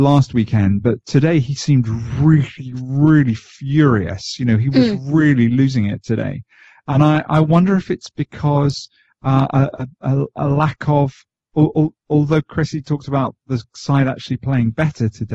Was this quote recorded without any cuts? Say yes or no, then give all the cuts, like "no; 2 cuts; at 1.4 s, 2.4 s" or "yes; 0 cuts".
yes; 0 cuts